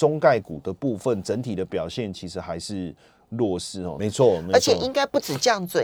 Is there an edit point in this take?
yes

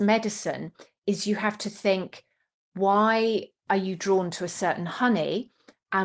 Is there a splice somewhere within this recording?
no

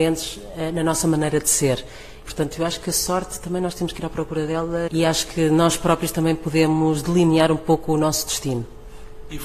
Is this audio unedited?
no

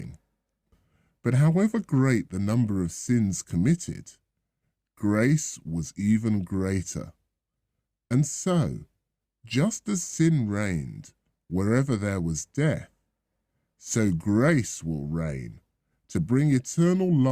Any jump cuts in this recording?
no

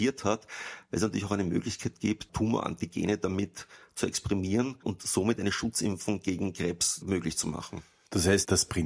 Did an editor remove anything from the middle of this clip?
no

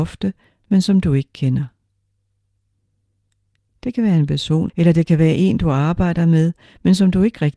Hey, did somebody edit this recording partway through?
yes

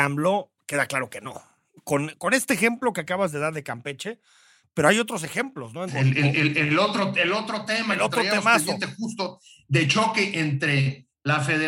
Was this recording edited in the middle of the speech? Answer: yes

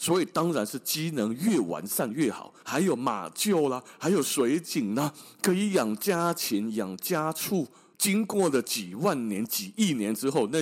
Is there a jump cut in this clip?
yes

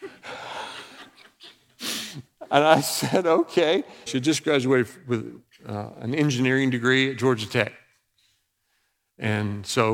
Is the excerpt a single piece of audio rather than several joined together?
no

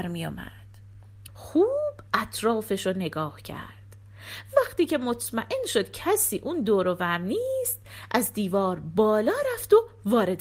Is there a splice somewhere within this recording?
yes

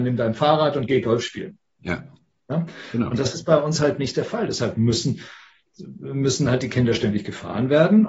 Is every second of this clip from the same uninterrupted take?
yes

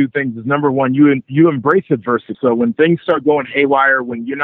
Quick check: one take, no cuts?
no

